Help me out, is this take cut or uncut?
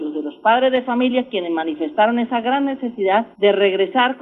cut